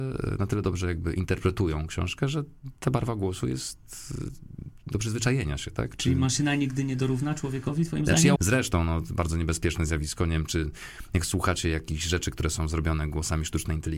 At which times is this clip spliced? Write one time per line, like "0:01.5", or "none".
0:08.4